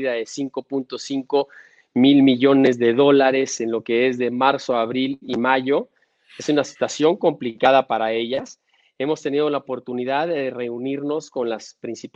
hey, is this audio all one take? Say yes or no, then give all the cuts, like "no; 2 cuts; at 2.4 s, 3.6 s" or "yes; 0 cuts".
yes; 0 cuts